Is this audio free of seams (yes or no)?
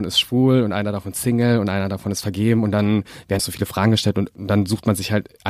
no